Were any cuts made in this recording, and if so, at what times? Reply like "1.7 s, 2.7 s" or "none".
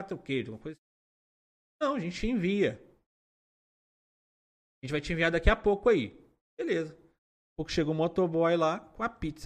none